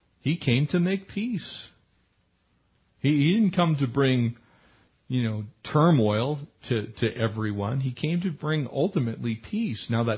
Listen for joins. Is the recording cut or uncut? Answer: uncut